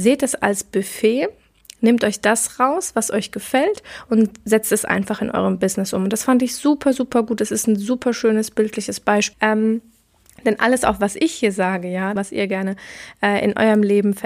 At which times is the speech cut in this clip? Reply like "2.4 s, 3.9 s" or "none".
9.3 s, 12.2 s